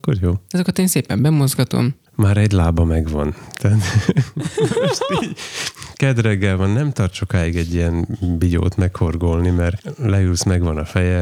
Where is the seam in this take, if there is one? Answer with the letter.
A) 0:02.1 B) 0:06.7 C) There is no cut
A